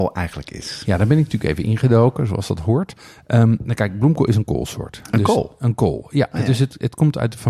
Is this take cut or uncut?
uncut